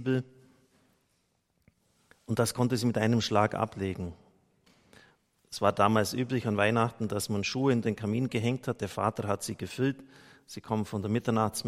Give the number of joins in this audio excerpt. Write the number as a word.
zero